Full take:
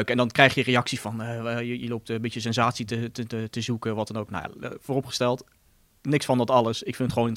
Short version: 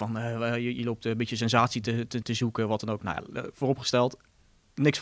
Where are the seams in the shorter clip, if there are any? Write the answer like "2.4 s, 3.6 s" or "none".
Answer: 2.2 s